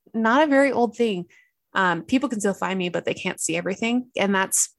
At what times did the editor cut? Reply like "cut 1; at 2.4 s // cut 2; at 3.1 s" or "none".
cut 1; at 1.6 s